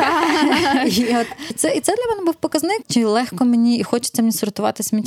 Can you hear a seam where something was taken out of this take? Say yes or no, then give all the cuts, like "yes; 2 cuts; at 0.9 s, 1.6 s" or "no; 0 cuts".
yes; 2 cuts; at 1.5 s, 2.8 s